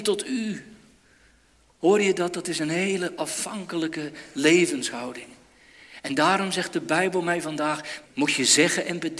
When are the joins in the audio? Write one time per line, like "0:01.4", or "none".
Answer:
0:08.0